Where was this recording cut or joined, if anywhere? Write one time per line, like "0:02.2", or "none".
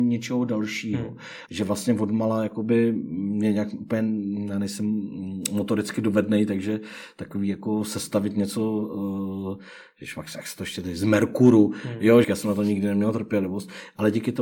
0:01.5
0:12.2

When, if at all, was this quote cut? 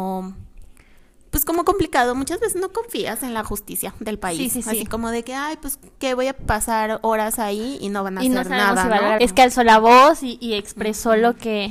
0:09.2

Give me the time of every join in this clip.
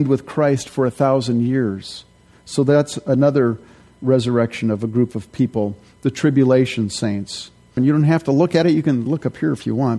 0:07.8
0:09.1

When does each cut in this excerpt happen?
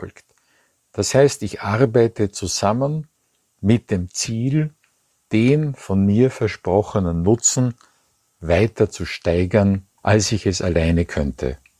0:10.0

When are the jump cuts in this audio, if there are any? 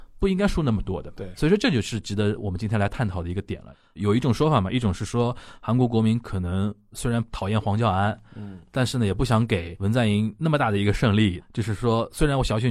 none

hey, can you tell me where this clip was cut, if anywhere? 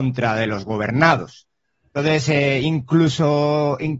none

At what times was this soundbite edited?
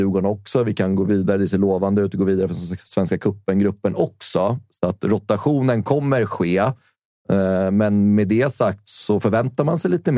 0:08.8

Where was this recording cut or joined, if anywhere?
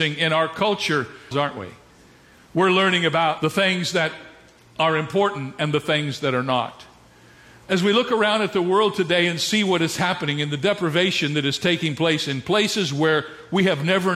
0:01.3

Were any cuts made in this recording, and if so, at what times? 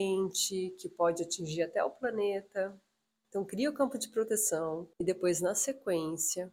0:03.2
0:04.9

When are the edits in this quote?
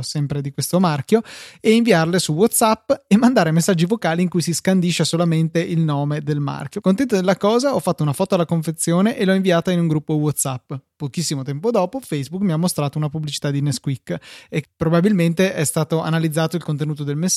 0:06.8
0:14.6

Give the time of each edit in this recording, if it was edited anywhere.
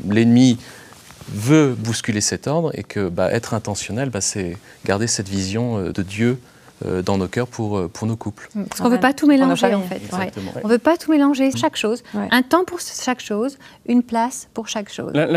0:05.9
0:11.5

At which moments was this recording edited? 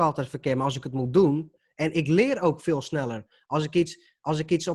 0:01.9

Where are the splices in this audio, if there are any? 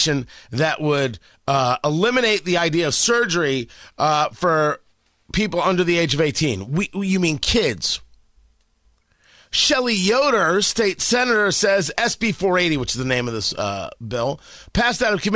none

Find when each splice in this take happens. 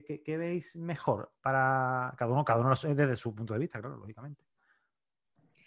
none

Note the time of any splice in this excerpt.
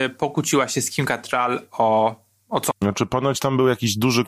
0:02.7

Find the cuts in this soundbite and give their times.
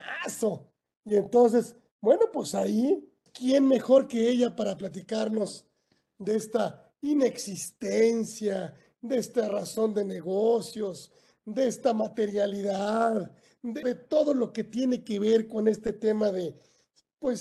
0:03.3
0:13.8

